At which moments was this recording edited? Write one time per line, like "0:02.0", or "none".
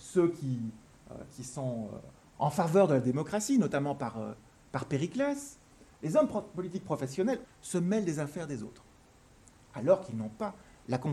0:06.0
0:07.4